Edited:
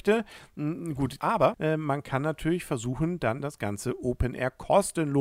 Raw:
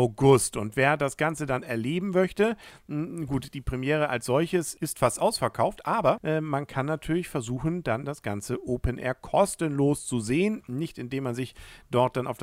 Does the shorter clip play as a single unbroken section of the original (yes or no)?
no